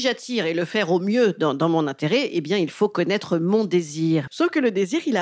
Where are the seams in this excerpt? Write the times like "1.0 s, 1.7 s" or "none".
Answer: 4.3 s